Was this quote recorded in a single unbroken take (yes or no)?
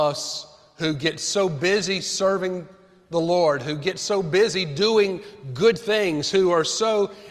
yes